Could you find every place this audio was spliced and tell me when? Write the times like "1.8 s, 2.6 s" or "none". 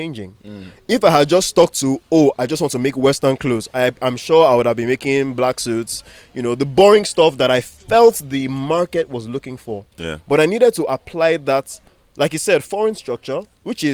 none

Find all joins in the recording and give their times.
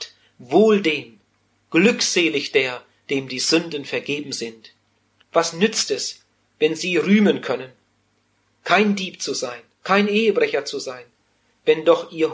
5.2 s, 9.8 s

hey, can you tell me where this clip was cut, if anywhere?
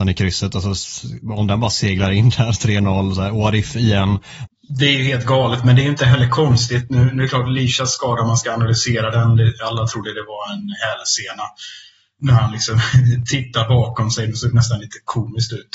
4.5 s

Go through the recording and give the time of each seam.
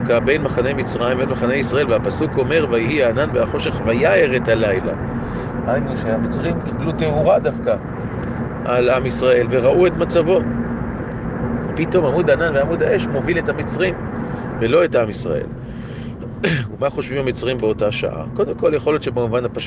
none

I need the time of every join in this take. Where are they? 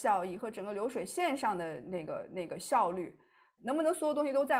3.6 s

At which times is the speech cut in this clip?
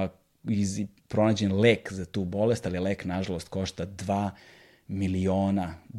none

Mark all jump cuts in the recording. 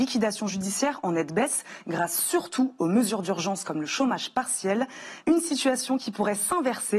5.2 s

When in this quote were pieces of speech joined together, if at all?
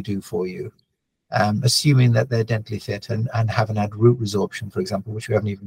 none

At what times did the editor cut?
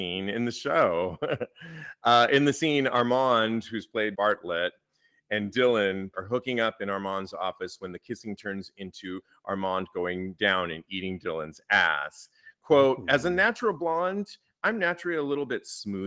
4.1 s, 6.1 s

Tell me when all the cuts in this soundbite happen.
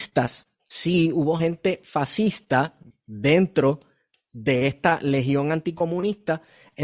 none

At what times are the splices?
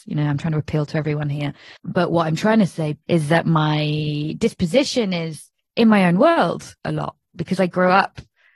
1.8 s, 3.0 s, 6.8 s

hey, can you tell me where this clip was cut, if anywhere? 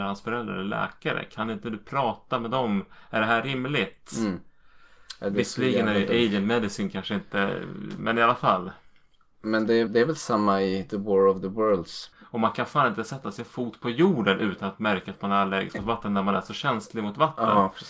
9.9 s, 12.1 s

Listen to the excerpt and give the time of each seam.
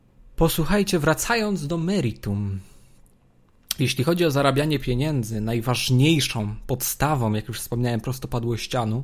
none

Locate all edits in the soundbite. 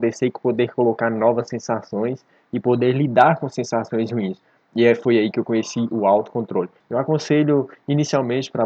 6.8 s

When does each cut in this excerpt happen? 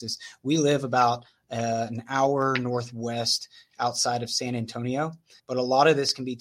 5.4 s

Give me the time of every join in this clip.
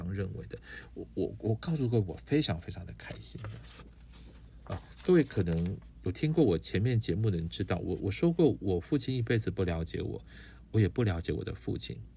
none

